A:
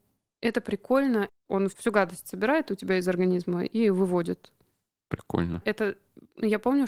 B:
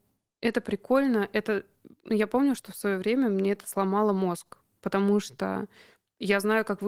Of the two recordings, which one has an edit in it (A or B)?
A